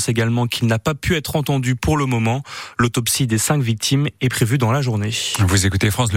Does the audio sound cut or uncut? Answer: uncut